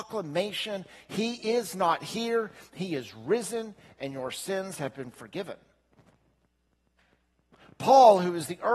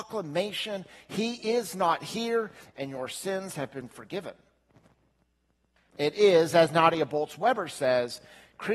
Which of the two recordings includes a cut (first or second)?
second